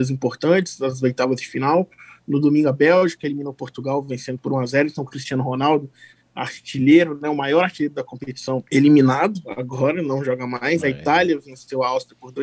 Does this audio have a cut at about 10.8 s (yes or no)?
no